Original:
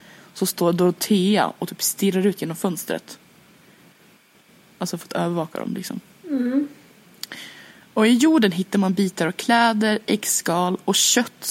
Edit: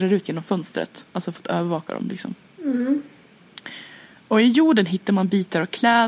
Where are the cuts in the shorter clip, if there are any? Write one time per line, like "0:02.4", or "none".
0:01.1